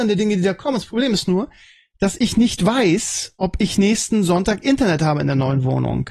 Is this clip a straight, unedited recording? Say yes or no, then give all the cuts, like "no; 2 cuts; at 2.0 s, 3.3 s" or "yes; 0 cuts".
yes; 0 cuts